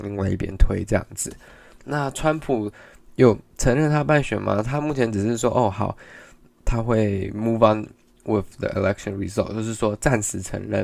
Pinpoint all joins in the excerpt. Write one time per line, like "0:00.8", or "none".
none